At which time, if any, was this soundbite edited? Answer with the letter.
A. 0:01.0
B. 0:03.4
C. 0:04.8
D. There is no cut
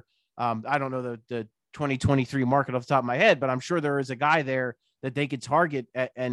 D